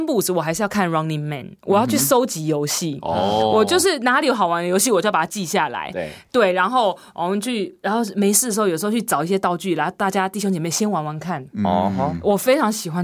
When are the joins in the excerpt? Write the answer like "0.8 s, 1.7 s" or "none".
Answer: none